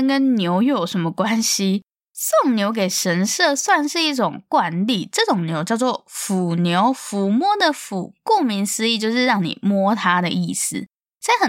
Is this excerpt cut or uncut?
uncut